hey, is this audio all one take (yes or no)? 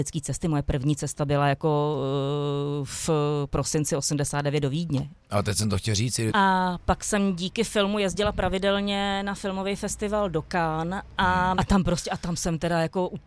no